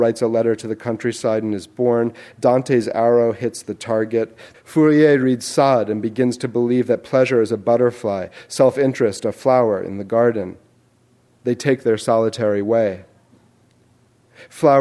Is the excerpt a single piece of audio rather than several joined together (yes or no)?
no